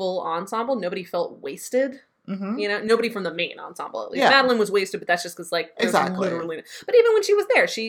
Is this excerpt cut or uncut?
uncut